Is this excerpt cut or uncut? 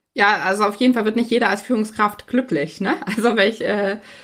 uncut